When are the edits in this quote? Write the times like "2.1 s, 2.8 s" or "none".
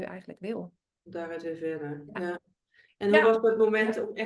none